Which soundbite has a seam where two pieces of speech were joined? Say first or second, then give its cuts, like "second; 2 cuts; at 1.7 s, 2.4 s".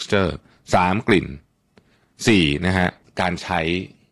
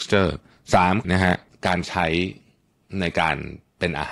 second; 1 cut; at 1.0 s